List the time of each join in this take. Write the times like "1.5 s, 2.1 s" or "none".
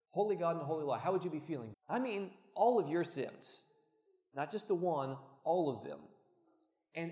1.7 s